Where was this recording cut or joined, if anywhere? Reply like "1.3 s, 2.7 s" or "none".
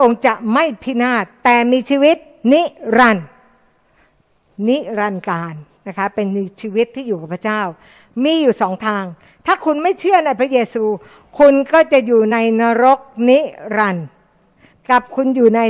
none

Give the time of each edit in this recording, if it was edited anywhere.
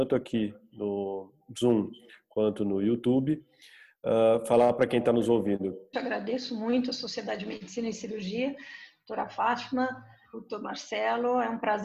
5.9 s, 10.3 s

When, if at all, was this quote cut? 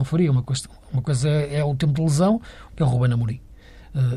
2.7 s

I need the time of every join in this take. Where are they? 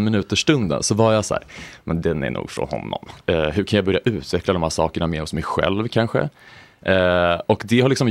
3.2 s

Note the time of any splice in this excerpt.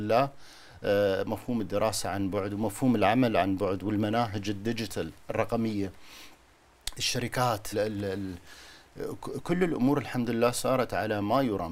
7.7 s

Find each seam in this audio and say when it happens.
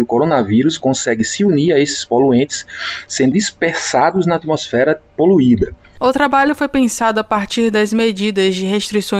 3.3 s

